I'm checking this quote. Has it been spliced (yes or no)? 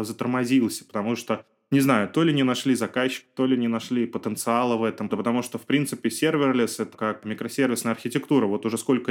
yes